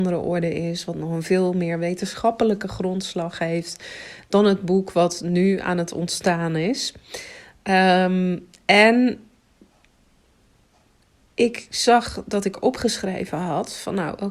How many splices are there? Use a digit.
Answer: 0